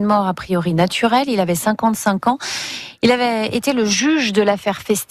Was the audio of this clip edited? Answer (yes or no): no